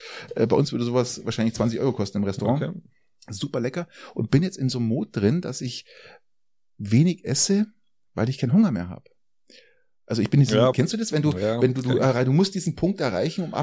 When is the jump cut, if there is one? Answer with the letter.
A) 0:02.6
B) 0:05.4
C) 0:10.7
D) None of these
C